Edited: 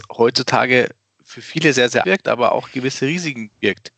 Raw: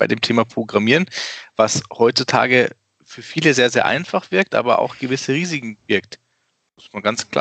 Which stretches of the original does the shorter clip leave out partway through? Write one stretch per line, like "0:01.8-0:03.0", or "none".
0:03.8-0:04.3